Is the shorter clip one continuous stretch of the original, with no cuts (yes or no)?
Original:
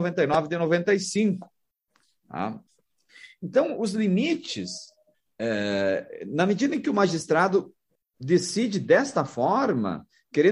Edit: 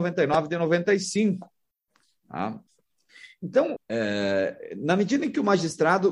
no